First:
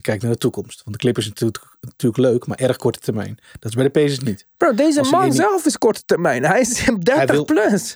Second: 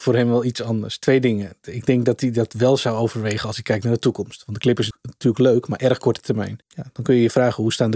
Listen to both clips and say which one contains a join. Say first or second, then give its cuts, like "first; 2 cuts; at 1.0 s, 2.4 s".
second; 2 cuts; at 4.9 s, 6.6 s